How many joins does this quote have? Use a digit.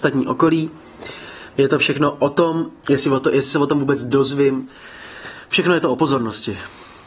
2